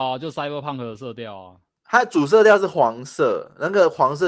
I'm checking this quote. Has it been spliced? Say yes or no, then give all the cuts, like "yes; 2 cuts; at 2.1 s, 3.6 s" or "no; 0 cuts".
no; 0 cuts